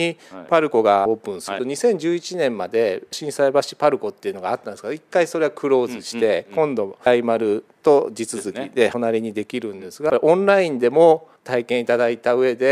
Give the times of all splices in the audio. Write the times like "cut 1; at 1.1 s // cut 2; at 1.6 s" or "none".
cut 1; at 11.4 s